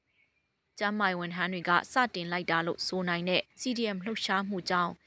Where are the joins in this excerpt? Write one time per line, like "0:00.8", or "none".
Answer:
0:03.5